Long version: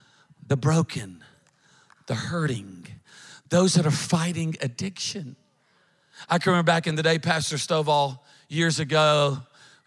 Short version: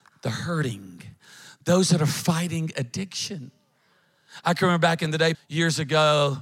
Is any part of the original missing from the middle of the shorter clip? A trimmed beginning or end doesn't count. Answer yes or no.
yes